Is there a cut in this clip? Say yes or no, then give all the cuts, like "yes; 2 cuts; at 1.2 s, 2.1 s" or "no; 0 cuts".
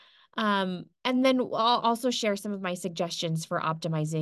no; 0 cuts